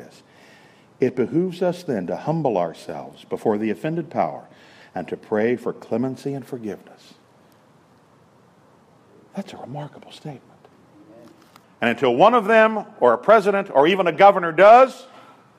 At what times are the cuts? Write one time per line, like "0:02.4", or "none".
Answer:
0:04.8
0:11.6